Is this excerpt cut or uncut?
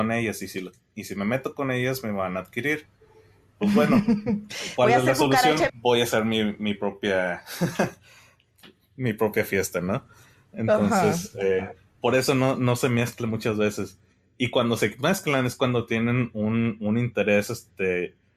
cut